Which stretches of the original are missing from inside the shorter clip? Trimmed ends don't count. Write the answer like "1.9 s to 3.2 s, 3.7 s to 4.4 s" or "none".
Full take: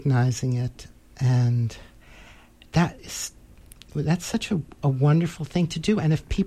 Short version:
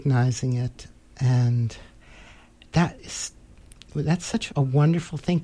4.5 s to 4.8 s